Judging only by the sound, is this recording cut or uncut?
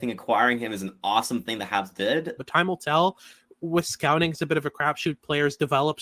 cut